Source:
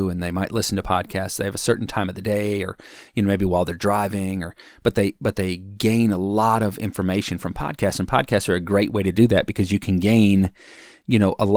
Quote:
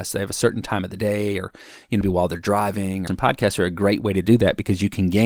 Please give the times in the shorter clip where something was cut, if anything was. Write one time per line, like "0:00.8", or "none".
0:02.0
0:03.1